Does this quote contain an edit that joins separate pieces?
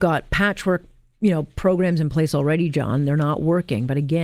no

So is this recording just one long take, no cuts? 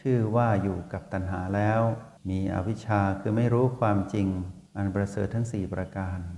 no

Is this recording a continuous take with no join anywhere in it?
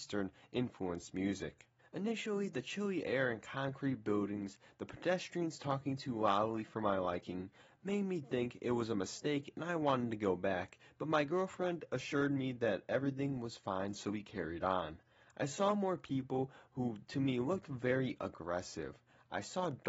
no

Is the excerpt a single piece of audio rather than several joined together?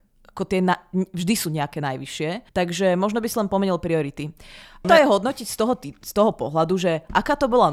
no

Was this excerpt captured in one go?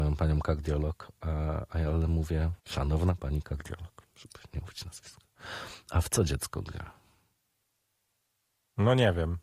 no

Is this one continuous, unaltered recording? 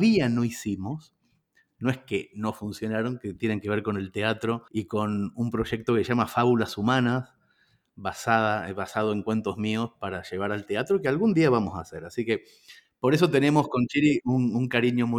no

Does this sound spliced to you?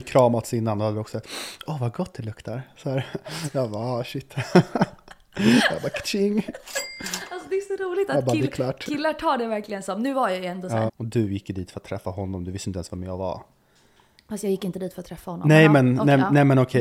yes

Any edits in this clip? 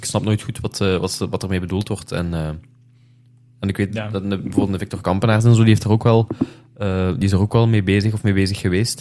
no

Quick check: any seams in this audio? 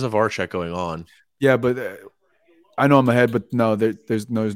no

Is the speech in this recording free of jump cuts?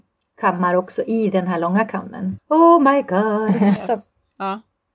no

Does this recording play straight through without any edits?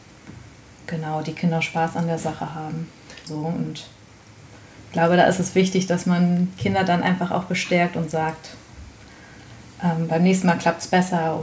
no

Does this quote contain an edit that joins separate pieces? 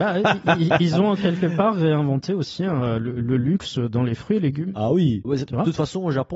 yes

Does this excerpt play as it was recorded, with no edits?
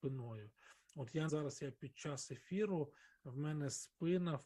no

